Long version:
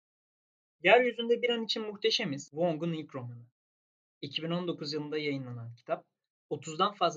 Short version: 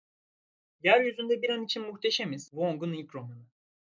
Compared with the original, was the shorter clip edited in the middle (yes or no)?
no